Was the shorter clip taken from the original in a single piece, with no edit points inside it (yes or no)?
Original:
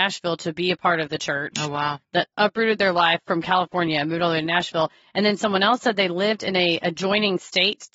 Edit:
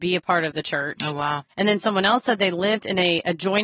no